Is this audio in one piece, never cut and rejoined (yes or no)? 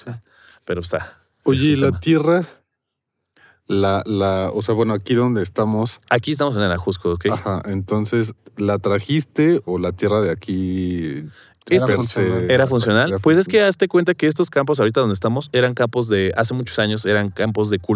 no